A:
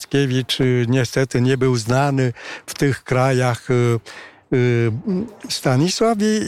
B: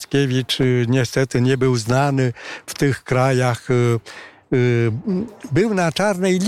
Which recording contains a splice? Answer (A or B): A